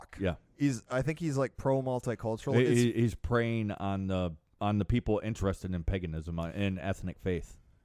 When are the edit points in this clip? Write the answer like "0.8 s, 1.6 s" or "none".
none